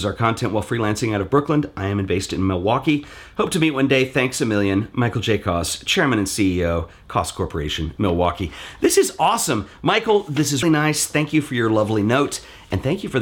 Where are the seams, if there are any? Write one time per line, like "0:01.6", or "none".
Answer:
0:10.6